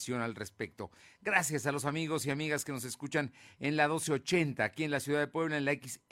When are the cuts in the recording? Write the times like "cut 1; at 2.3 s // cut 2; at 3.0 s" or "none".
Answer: none